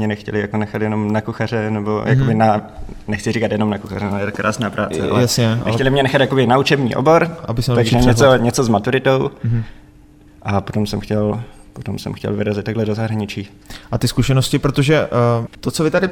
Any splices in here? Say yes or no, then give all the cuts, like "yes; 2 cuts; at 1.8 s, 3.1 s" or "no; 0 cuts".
yes; 1 cut; at 10.3 s